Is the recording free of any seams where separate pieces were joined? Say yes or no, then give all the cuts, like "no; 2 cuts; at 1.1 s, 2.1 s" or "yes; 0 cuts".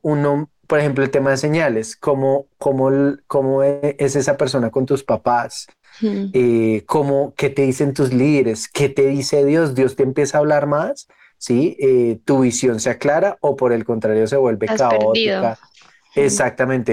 yes; 0 cuts